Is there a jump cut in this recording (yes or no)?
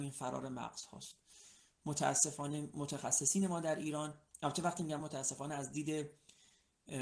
yes